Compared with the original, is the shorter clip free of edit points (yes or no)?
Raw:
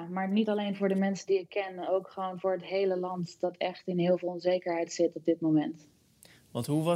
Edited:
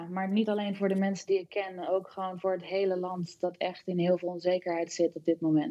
yes